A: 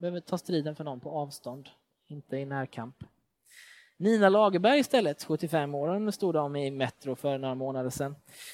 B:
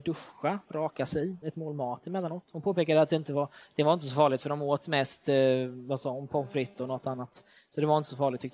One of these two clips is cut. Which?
B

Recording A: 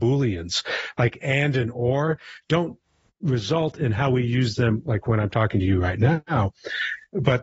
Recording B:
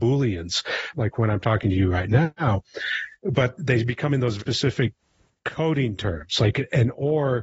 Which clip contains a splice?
B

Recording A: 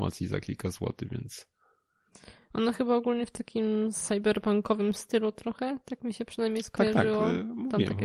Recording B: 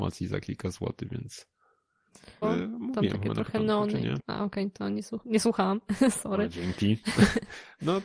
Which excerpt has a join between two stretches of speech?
B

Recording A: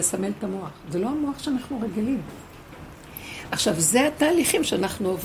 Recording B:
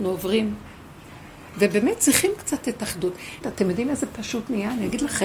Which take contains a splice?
B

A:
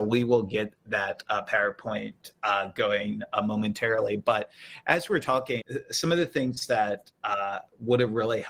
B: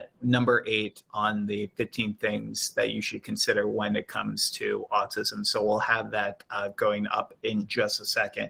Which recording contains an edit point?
A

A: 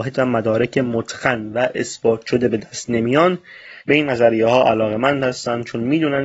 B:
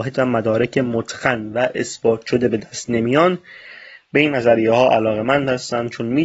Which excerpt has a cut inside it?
A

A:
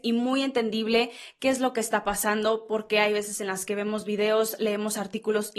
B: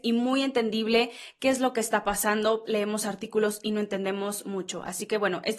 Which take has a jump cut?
B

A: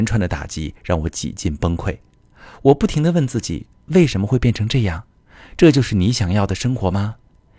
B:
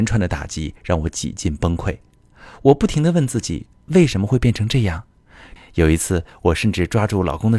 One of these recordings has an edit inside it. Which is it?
B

